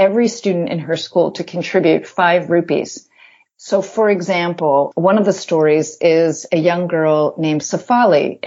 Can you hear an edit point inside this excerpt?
yes; 1 cut; at 3.5 s

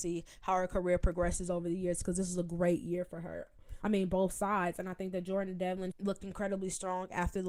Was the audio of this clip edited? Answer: yes; 2 cuts; at 3.8 s, 5.9 s

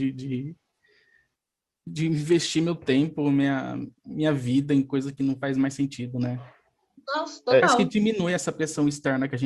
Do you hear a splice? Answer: no; 0 cuts

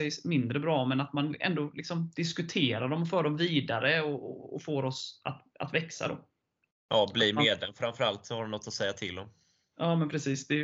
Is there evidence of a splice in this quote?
yes; 1 cut; at 5.5 s

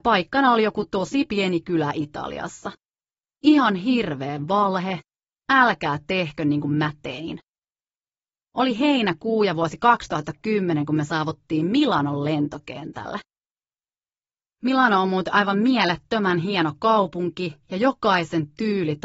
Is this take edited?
yes; 1 cut; at 8.3 s

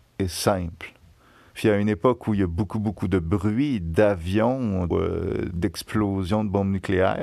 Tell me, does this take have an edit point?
yes; 2 cuts; at 1.5 s, 4.9 s

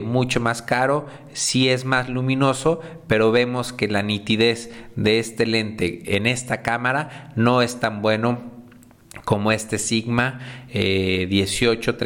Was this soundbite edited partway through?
no; 0 cuts

